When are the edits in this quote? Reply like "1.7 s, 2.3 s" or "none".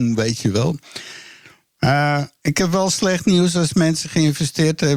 none